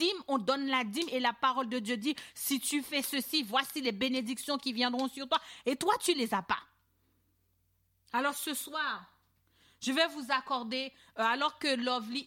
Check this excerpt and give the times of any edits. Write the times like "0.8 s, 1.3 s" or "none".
none

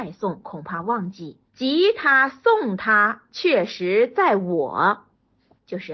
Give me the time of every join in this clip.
1.5 s

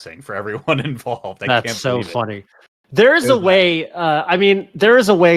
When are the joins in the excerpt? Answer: none

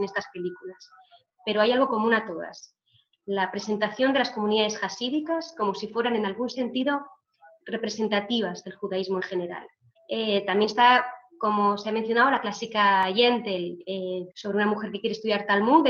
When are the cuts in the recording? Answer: 10.0 s, 14.3 s

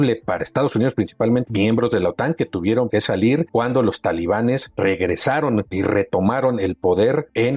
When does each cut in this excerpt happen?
1.4 s, 2.9 s

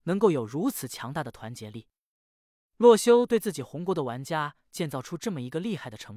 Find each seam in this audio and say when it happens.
none

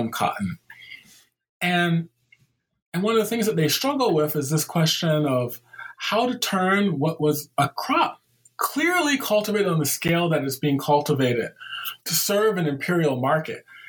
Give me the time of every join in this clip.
12.0 s

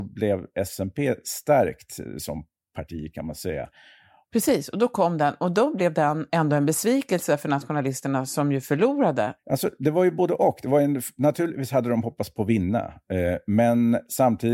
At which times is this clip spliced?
4.2 s, 9.4 s

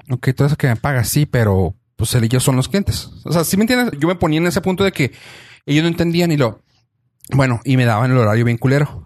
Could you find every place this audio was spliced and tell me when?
3.9 s

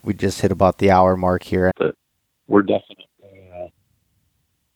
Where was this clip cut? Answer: 1.7 s

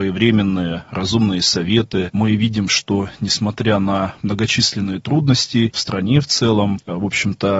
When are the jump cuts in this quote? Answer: 2.1 s, 5.7 s

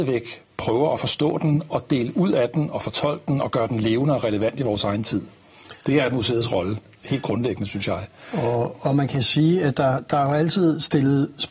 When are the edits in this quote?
none

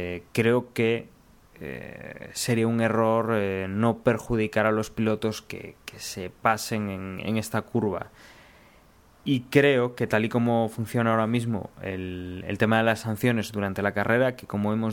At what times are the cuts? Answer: 9.1 s

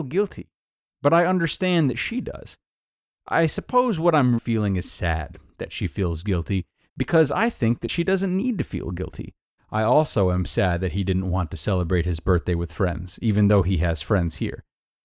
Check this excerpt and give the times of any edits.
4.4 s, 9.6 s

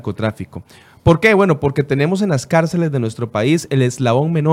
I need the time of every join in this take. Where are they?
none

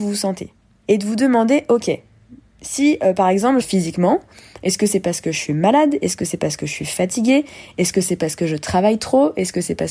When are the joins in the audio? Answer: 3.6 s

